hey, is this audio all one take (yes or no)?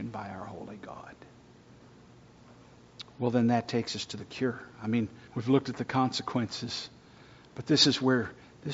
no